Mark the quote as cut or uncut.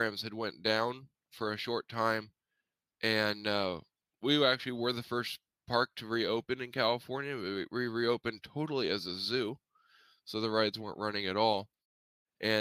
uncut